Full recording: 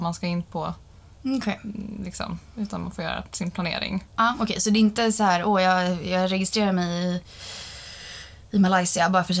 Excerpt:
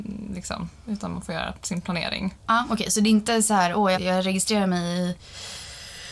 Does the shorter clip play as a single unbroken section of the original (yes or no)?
no